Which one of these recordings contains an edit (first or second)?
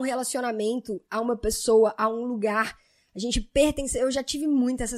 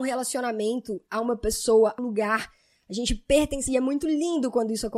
second